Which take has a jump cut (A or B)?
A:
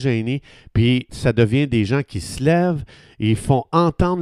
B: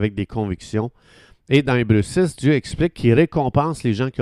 A